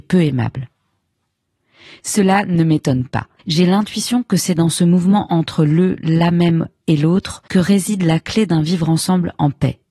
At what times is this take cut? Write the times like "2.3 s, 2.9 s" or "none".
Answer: 3.4 s, 7.5 s